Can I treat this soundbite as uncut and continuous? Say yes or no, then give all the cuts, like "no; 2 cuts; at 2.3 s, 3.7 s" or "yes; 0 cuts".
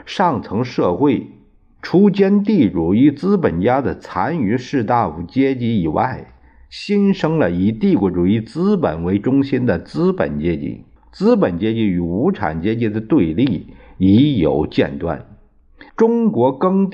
no; 2 cuts; at 11.0 s, 15.9 s